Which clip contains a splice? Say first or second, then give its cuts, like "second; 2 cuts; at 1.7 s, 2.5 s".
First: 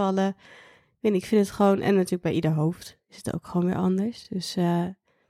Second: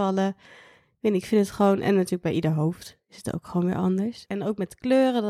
second; 1 cut; at 4.2 s